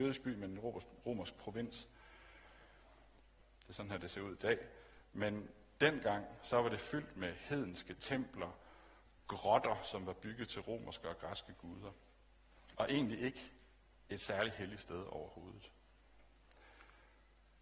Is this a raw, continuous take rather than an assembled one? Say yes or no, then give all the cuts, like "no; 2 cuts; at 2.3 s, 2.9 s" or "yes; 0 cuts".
no; 2 cuts; at 3.5 s, 12.7 s